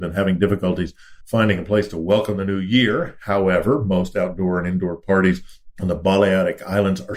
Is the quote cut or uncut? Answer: uncut